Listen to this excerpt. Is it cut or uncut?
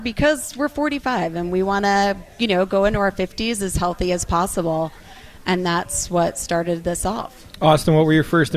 uncut